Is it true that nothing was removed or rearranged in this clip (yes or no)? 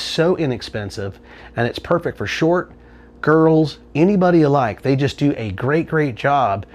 no